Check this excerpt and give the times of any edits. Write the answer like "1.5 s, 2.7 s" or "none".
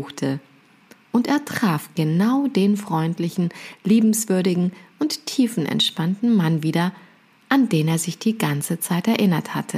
none

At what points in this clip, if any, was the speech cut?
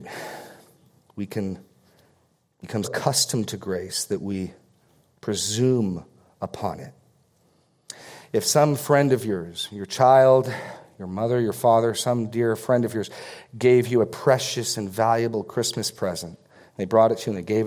2.8 s

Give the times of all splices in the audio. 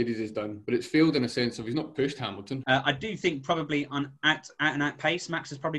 2.6 s

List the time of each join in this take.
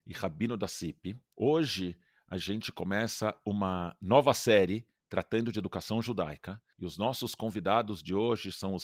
none

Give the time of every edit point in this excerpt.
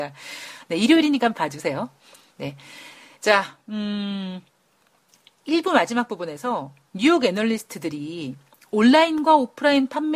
none

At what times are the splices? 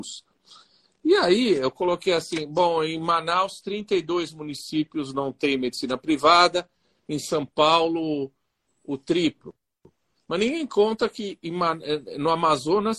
none

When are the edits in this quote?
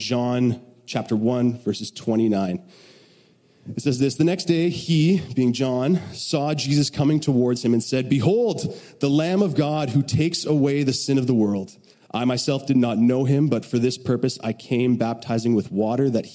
11.9 s

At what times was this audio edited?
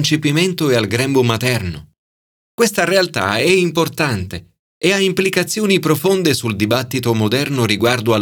none

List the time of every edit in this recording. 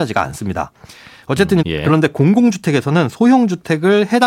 1.6 s

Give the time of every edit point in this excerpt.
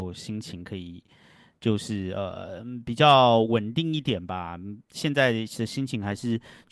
none

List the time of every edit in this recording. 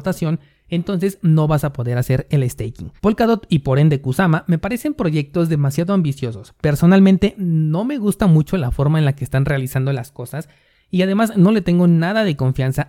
3.0 s

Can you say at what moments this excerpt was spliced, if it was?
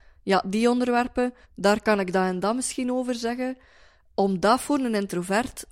1.4 s

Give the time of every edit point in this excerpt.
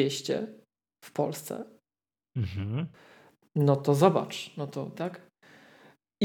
5.0 s

